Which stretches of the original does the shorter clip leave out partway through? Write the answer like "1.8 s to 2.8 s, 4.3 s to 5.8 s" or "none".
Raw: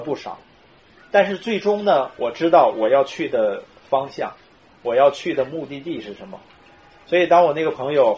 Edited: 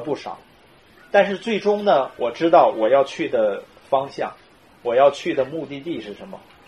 none